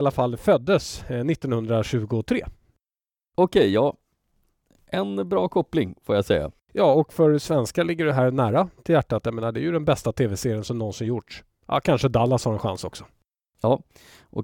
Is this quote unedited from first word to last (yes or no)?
yes